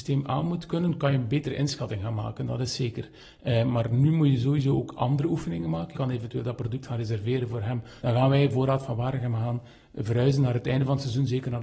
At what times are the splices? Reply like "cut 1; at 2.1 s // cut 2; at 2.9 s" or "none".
cut 1; at 5.9 s // cut 2; at 8.0 s